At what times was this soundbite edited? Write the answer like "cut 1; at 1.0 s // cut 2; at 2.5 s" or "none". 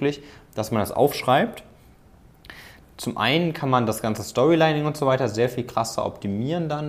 cut 1; at 2.8 s